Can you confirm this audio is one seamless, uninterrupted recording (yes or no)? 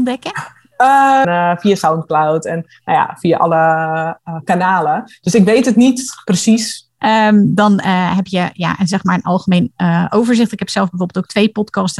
no